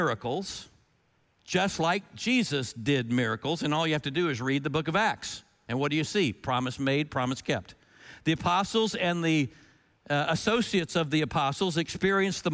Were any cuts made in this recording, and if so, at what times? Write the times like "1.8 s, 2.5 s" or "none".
none